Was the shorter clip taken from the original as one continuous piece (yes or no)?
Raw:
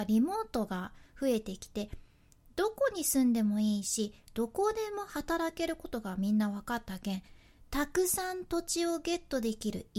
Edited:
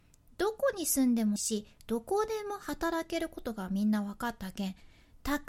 no